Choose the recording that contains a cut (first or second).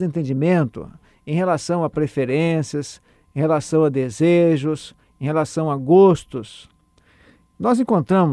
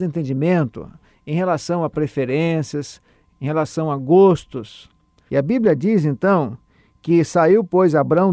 second